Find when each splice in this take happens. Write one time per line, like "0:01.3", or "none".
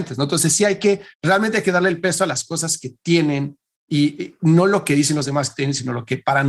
0:01.1